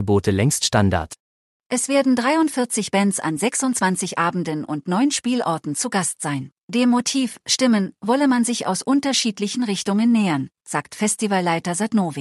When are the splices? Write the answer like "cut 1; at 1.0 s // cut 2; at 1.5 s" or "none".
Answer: cut 1; at 1.5 s // cut 2; at 6.6 s

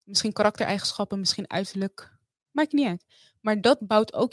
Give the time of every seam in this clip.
none

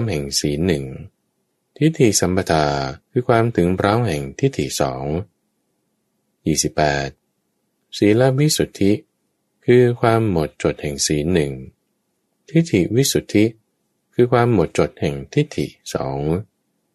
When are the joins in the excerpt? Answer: cut 1; at 3.0 s

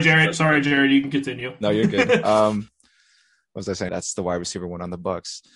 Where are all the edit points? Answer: cut 1; at 3.9 s

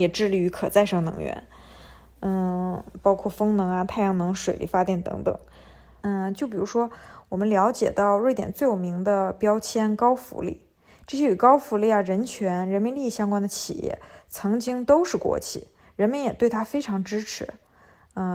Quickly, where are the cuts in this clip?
cut 1; at 6.0 s

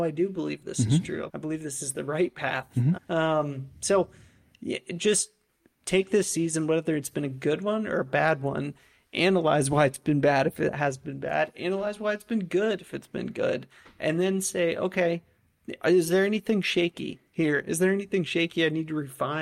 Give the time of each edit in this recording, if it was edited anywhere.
cut 1; at 1.3 s // cut 2; at 2.9 s

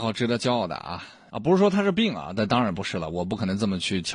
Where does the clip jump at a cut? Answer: cut 1; at 1.3 s

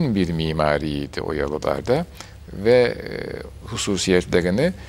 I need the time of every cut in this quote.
cut 1; at 3.6 s

